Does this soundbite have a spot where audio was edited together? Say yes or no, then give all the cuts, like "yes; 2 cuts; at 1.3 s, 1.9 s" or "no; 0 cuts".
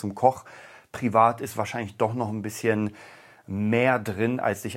no; 0 cuts